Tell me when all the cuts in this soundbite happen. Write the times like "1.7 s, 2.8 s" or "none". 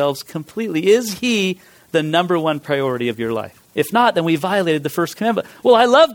3.7 s